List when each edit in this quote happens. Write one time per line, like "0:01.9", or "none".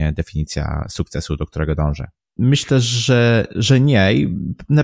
0:02.4

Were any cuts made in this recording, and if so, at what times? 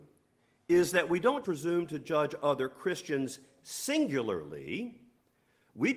0:01.4

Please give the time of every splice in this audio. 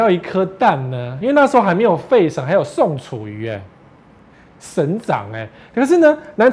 none

